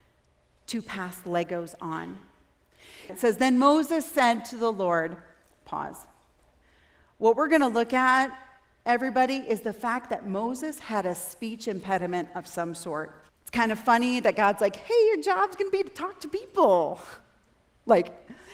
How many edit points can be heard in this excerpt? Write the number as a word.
two